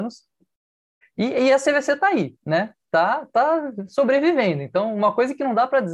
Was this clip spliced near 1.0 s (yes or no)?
yes